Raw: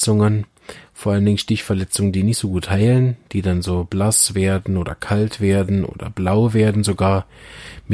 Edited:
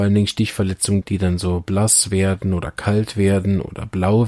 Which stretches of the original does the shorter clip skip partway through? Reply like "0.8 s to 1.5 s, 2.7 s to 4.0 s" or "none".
2.1 s to 3.2 s

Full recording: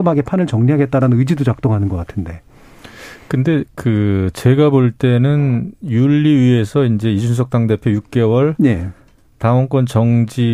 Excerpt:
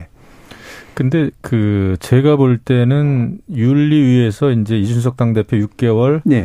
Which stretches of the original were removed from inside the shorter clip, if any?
none

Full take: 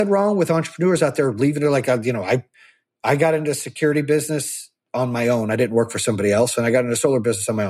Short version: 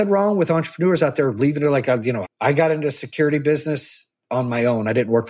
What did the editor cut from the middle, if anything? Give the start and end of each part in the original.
2.2 s to 2.9 s

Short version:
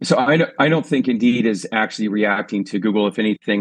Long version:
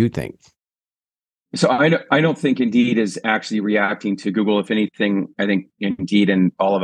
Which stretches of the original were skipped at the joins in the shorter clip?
none

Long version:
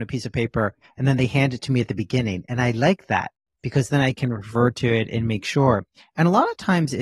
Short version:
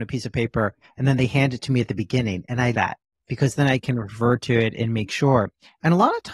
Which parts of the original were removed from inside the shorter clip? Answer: 2.7 s to 3.1 s

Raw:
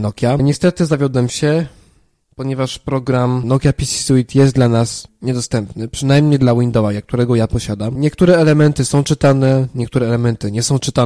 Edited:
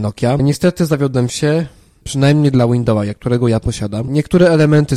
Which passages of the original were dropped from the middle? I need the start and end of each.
2.0 s to 5.9 s

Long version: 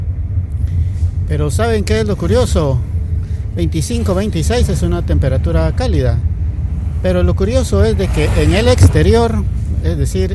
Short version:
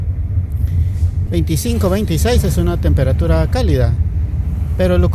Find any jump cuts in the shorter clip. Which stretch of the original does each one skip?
1.3 s to 3.5 s

